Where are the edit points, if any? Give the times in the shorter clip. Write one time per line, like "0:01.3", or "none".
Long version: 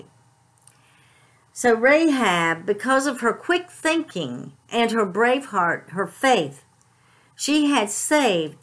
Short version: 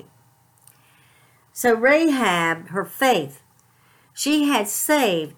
0:02.6